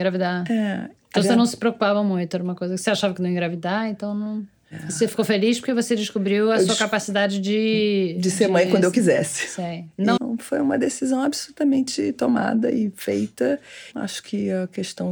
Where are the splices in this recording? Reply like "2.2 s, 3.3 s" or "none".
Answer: 4.6 s, 10.2 s, 13.9 s

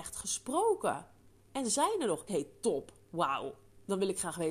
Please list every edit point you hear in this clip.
2.3 s

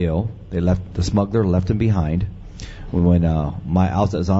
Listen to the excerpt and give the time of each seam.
none

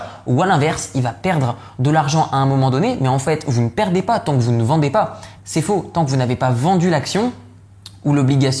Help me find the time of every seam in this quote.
5.4 s

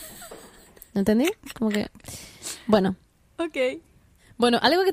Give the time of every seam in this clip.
none

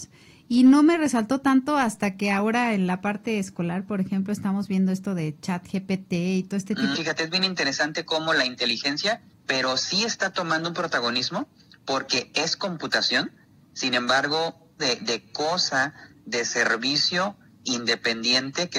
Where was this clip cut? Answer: 6.9 s, 9.3 s, 14.8 s

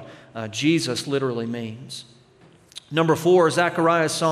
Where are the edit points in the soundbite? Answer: none

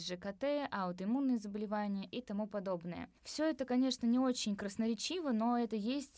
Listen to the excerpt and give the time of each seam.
3.2 s

